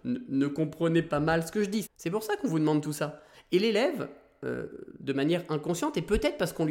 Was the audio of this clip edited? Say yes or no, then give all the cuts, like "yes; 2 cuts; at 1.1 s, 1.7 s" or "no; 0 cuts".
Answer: yes; 2 cuts; at 1.8 s, 3.3 s